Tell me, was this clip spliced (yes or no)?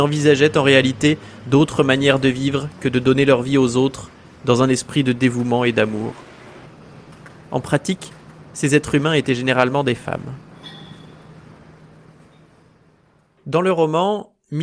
no